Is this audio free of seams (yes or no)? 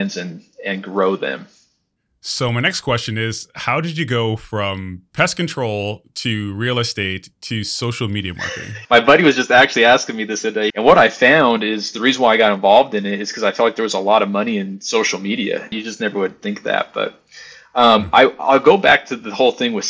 no